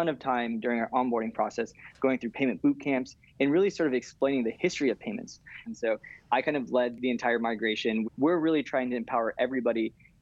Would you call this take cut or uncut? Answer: cut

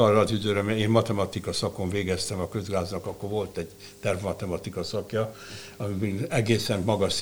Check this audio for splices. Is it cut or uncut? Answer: uncut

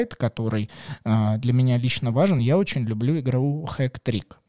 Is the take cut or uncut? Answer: uncut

